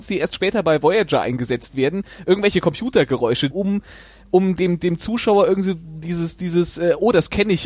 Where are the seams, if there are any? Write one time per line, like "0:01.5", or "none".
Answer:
0:03.5